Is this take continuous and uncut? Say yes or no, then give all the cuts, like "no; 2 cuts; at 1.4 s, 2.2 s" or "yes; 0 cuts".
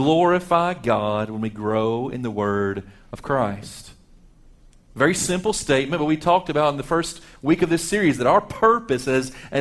yes; 0 cuts